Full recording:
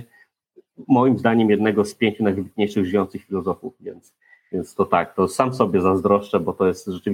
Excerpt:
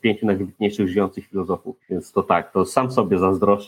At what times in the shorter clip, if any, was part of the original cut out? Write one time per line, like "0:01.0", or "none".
0:01.8